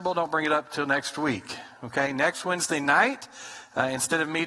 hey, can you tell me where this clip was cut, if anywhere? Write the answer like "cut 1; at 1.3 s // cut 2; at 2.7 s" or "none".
none